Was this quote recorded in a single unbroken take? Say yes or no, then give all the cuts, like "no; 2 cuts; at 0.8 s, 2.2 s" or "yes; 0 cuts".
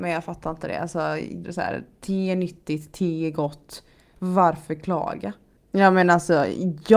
no; 2 cuts; at 1.4 s, 5.6 s